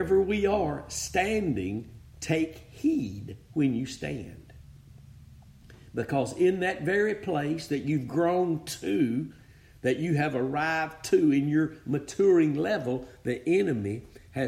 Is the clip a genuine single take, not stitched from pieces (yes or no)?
yes